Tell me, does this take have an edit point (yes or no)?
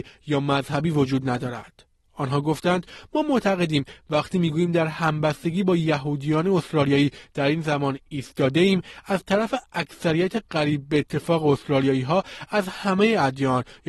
no